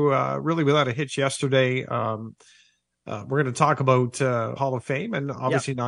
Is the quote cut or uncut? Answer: cut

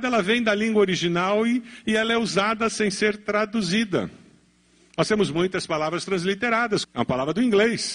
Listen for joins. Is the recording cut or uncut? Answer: cut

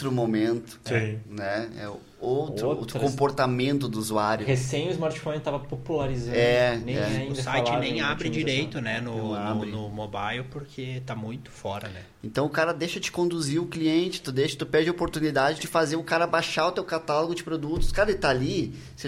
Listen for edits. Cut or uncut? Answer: uncut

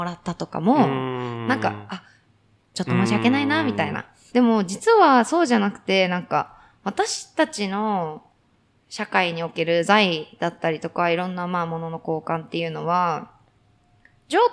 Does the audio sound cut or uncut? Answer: cut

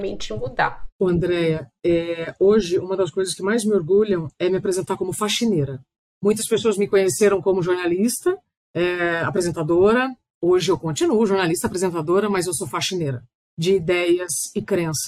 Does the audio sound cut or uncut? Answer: uncut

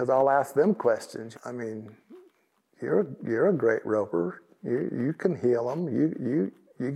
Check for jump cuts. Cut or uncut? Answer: cut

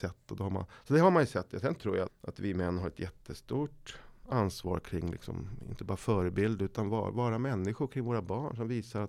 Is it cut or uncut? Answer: cut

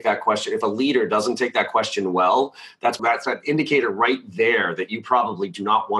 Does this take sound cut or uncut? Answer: cut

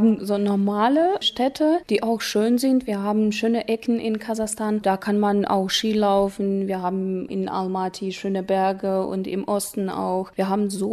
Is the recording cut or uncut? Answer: uncut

